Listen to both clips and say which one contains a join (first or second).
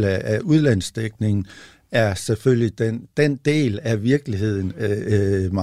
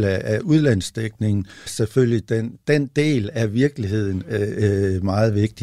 second